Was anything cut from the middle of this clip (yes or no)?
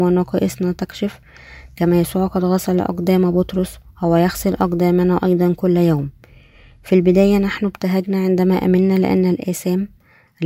no